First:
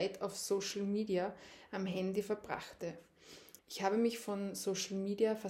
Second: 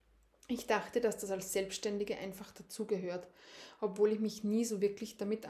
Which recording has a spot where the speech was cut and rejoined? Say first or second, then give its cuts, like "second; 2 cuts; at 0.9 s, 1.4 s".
first; 1 cut; at 3.6 s